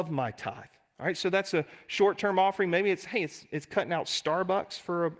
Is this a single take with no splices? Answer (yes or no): yes